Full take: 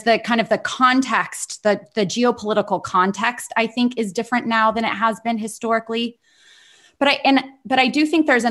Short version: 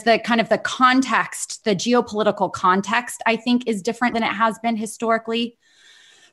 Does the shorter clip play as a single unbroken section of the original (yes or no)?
no